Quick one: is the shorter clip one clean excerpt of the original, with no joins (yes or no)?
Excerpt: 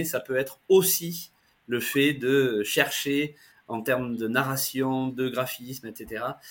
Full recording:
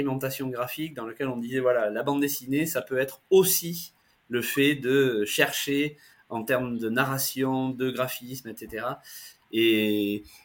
yes